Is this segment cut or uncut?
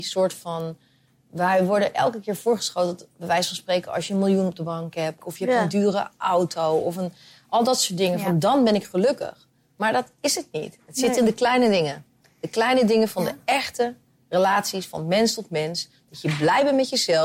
cut